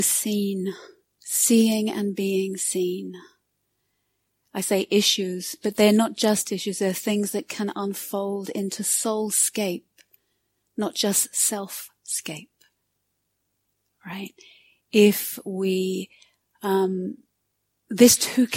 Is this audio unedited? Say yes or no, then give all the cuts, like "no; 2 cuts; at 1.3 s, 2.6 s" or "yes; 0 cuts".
yes; 0 cuts